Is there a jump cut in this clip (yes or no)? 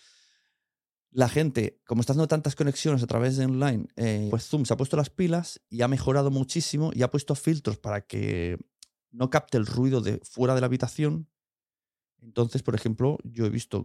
yes